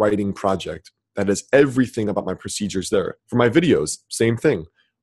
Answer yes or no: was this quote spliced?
yes